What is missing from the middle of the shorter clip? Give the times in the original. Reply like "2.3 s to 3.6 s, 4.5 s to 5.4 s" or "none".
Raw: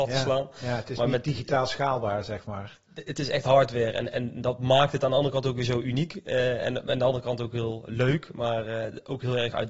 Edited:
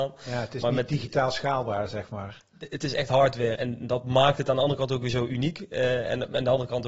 3.9 s to 4.1 s